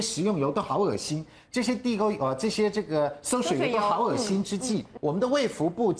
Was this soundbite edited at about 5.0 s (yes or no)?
yes